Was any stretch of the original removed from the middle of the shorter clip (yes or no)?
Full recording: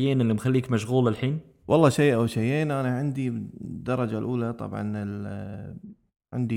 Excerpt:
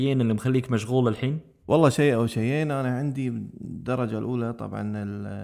no